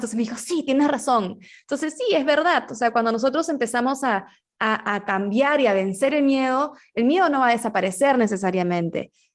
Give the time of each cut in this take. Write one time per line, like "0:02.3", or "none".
none